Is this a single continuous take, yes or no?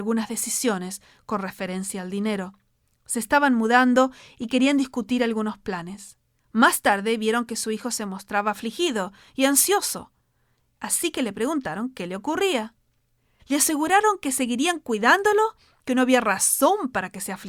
no